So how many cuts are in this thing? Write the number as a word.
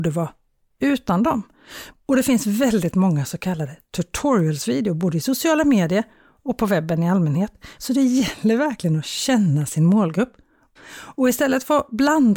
three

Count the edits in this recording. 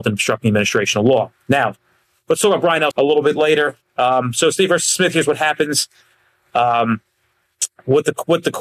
one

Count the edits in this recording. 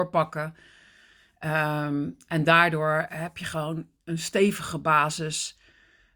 zero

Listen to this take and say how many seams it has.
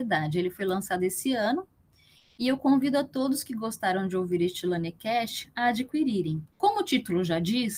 one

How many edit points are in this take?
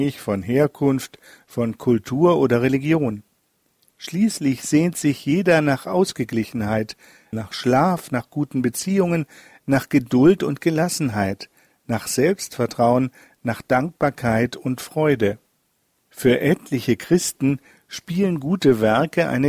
two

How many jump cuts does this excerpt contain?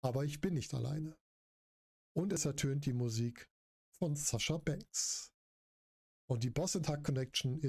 zero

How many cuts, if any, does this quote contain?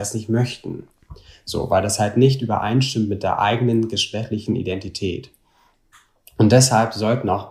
zero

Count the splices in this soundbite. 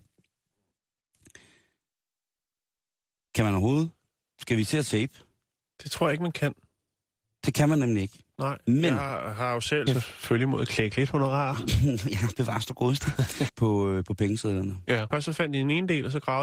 three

